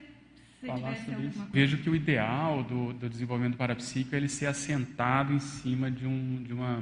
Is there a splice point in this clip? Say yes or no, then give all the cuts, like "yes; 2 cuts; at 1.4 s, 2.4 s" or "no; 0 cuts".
yes; 1 cut; at 1.5 s